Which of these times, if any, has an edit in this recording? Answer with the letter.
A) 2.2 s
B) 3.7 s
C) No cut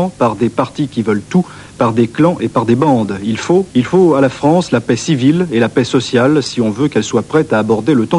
B